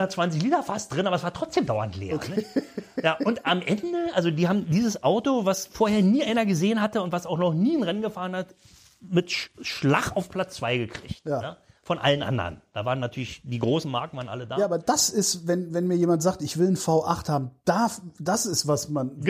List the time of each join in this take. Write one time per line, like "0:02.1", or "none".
none